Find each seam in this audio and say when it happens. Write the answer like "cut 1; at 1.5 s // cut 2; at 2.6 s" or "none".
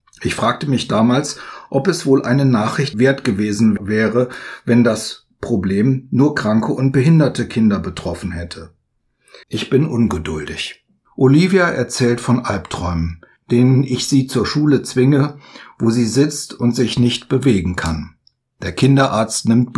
cut 1; at 9.4 s

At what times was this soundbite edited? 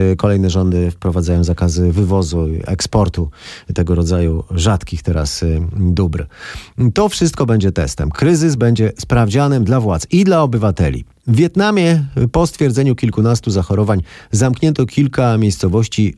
none

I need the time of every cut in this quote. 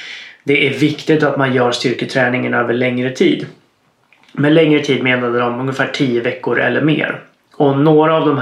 none

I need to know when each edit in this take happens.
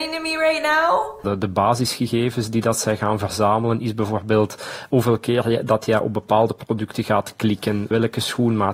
cut 1; at 1.2 s

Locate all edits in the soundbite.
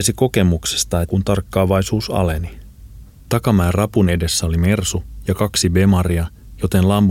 cut 1; at 1.0 s // cut 2; at 3.2 s

